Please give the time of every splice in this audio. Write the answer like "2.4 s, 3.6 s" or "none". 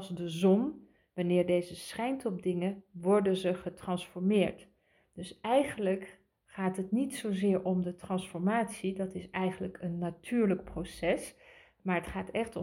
none